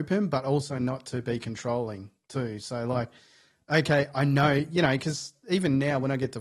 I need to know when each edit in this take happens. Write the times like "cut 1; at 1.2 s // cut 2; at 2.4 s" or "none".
none